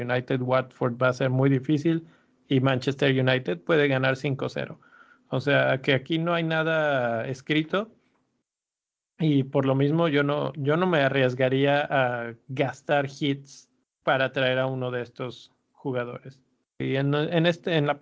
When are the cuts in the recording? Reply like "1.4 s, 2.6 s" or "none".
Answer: 16.8 s

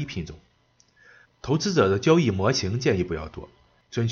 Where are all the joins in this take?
1.2 s

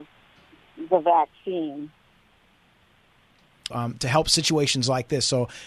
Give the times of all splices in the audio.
3.7 s

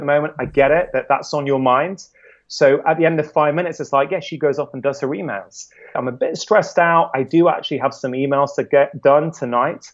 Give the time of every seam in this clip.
5.9 s

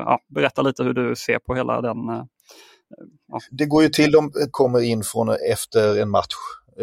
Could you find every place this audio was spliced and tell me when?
3.5 s, 4.5 s

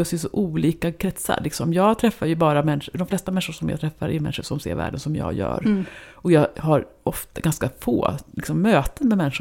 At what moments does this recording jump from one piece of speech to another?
none

